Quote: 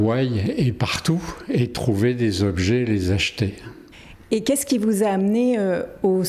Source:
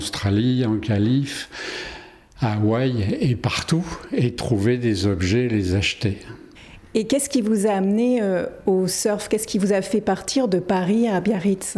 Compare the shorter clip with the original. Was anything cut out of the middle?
no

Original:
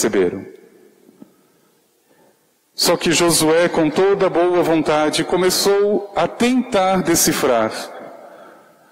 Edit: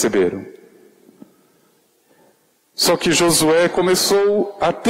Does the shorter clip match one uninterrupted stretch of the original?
no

